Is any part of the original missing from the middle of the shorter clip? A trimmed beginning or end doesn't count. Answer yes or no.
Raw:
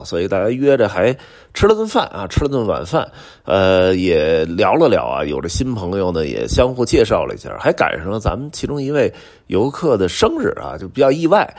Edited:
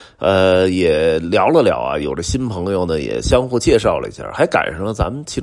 no